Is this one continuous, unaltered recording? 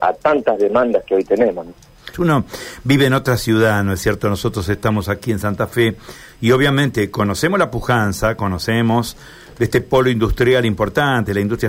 no; 1 cut; at 2.1 s

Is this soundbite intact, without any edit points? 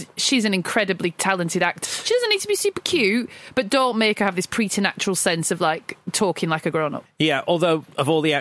no; 2 cuts; at 1.9 s, 7.1 s

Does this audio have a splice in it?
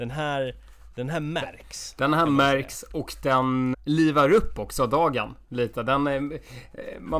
yes; 1 cut; at 3.7 s

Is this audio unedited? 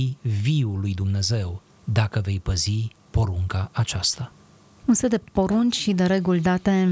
yes; 0 cuts

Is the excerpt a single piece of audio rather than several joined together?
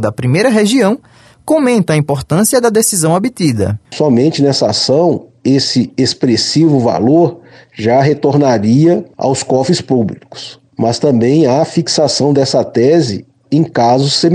yes; 0 cuts

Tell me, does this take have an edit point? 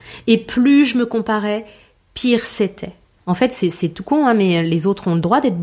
yes; 1 cut; at 3.2 s

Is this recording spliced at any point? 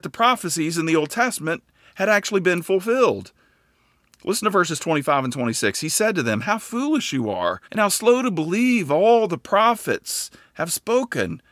yes; 1 cut; at 7.6 s

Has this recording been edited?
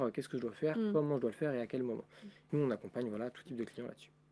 yes; 1 cut; at 2.5 s

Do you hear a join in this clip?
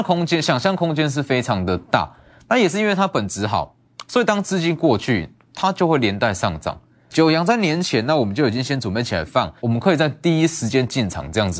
yes; 2 cuts; at 7.1 s, 9.6 s

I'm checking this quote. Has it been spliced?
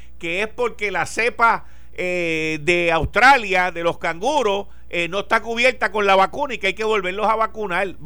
no; 0 cuts

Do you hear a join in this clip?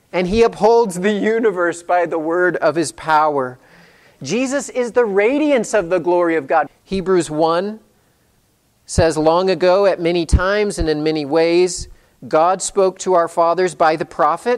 yes; 1 cut; at 6.7 s

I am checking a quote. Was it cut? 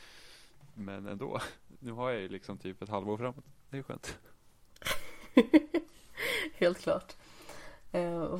no; 0 cuts

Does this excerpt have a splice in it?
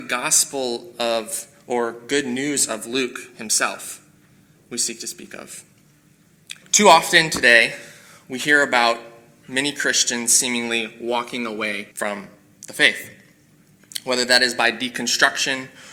yes; 2 cuts; at 6.6 s, 11.9 s

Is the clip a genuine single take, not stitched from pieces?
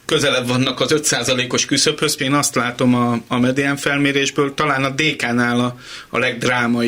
no; 1 cut; at 2.2 s

